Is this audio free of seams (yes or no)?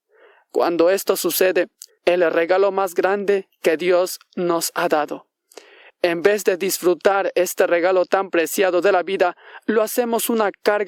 no